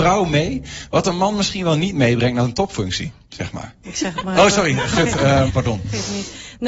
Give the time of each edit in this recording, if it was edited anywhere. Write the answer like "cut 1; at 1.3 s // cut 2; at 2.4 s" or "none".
cut 1; at 3.8 s // cut 2; at 5.5 s